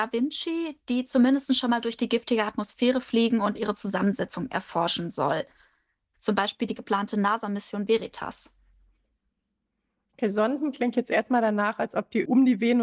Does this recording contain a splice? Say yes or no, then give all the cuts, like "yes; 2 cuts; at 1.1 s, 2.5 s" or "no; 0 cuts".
yes; 1 cut; at 6.1 s